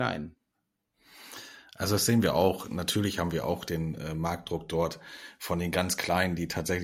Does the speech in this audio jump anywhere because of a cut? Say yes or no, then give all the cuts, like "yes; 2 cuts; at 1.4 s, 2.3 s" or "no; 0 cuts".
no; 0 cuts